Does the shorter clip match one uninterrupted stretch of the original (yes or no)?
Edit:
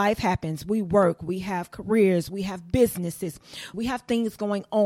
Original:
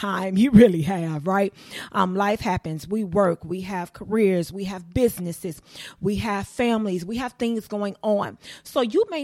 no